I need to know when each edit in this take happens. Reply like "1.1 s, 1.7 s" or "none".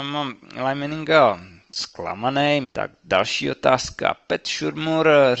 2.6 s